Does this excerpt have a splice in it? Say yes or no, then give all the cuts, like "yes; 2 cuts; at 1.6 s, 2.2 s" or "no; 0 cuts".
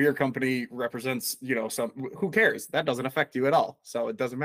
no; 0 cuts